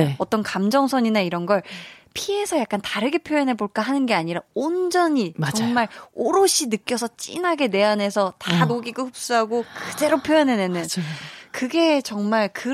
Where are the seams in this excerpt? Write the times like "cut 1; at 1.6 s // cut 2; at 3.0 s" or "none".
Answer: none